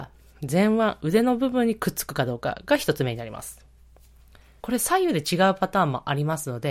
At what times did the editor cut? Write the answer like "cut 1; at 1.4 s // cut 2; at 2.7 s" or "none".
cut 1; at 4.6 s